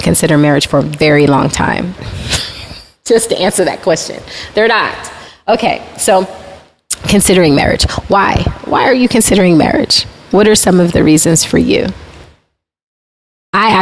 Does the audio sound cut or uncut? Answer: cut